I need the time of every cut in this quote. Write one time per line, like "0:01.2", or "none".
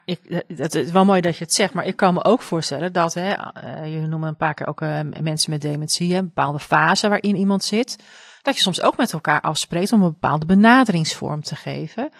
none